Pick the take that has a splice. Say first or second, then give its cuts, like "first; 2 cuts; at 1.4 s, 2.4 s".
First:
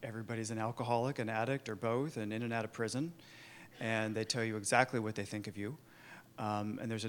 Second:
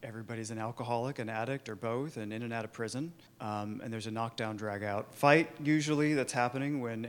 second; 1 cut; at 3.3 s